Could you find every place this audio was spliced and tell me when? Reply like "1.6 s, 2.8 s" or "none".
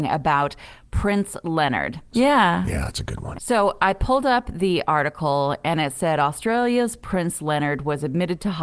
2.1 s, 3.3 s